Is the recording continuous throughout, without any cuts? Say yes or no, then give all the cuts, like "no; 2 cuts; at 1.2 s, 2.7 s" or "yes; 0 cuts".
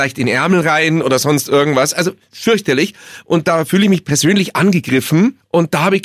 yes; 0 cuts